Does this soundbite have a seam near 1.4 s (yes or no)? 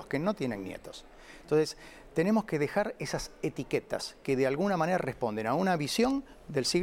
no